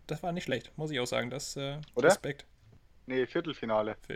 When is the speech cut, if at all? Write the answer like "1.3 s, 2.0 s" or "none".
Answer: none